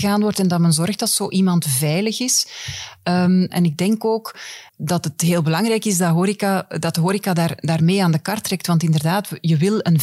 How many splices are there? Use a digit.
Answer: 2